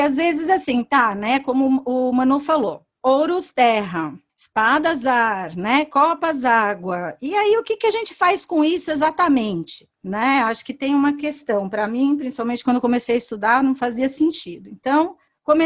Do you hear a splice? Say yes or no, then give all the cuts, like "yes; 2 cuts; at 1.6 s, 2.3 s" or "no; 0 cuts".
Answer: no; 0 cuts